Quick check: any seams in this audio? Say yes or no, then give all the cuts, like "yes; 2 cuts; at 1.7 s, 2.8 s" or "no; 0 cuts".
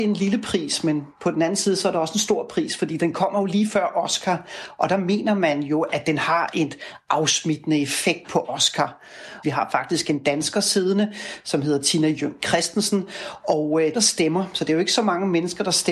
yes; 2 cuts; at 9.4 s, 13.9 s